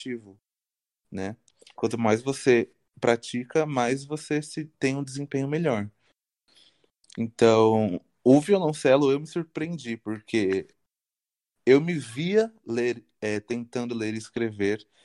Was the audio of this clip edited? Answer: no; 0 cuts

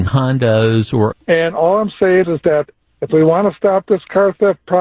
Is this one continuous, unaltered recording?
no; 2 cuts; at 1.1 s, 2.2 s

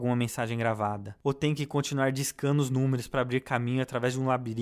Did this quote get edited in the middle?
no; 0 cuts

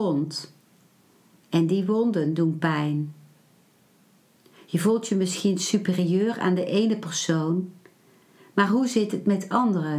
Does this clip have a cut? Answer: no; 0 cuts

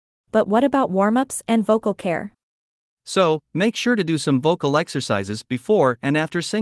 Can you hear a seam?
yes; 1 cut; at 2.9 s

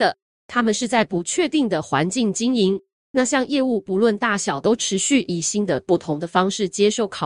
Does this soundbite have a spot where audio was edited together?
no; 0 cuts

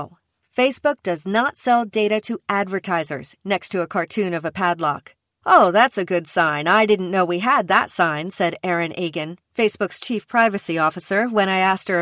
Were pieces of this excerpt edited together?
yes; 1 cut; at 3.4 s

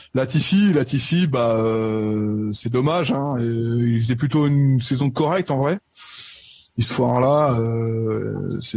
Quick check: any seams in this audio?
no; 0 cuts

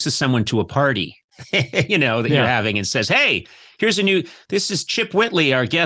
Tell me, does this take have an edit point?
no; 0 cuts

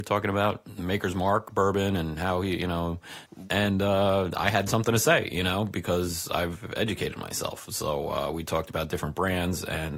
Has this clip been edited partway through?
yes; 1 cut; at 3.5 s

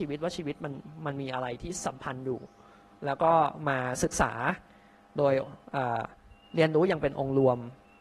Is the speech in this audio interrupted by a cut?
no; 0 cuts

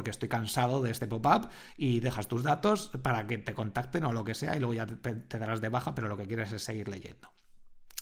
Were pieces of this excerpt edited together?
no; 0 cuts

